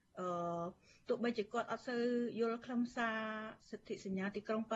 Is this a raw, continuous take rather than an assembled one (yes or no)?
no